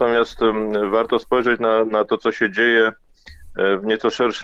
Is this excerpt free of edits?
yes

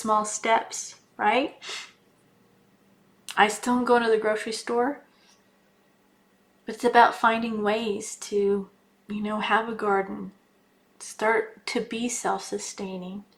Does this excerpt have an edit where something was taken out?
yes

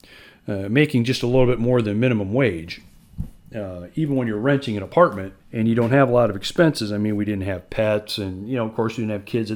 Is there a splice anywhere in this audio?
yes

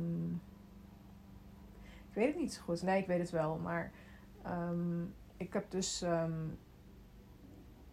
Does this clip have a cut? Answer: no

